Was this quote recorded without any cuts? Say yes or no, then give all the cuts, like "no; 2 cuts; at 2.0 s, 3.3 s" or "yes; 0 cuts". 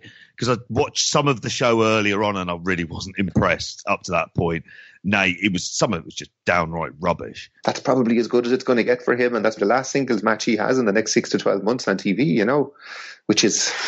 no; 2 cuts; at 7.6 s, 9.6 s